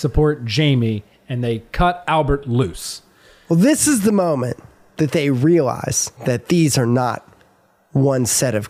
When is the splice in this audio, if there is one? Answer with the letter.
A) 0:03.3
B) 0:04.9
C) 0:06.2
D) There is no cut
C